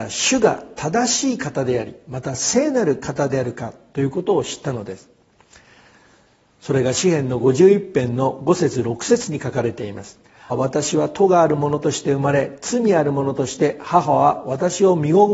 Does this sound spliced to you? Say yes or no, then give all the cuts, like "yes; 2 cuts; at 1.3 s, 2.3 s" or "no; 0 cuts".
yes; 1 cut; at 10.5 s